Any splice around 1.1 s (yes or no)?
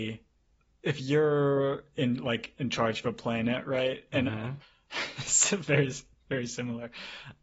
no